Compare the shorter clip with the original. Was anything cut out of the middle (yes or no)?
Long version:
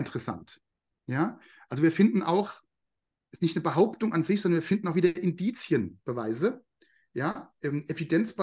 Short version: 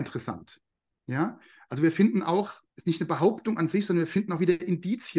yes